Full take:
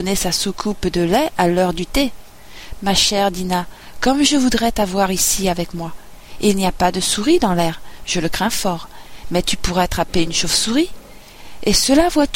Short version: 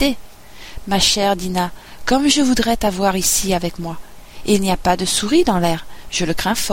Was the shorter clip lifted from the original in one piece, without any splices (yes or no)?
yes